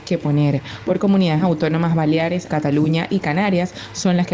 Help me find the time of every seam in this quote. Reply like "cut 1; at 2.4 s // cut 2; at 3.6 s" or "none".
cut 1; at 2.5 s